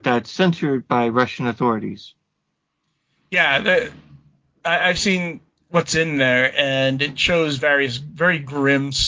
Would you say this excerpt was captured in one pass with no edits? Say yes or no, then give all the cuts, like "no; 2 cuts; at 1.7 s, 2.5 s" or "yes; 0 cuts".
yes; 0 cuts